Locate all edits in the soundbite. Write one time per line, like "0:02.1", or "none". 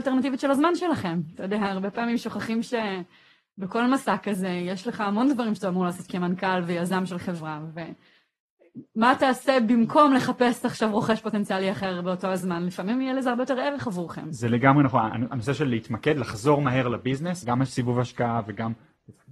0:17.4